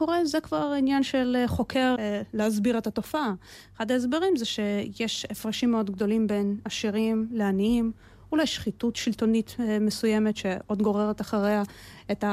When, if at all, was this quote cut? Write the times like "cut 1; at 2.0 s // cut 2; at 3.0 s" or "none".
cut 1; at 2.0 s